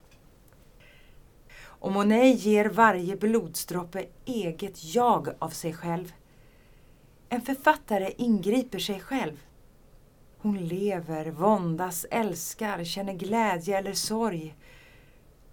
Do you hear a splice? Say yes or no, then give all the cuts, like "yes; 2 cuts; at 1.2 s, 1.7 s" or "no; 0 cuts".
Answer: yes; 2 cuts; at 1.5 s, 10.3 s